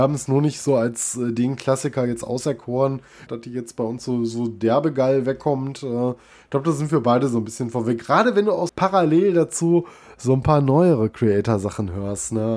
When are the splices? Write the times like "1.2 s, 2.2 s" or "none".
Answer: 3.3 s, 8.7 s